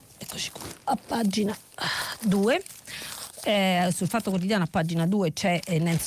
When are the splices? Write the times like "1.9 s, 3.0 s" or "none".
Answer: none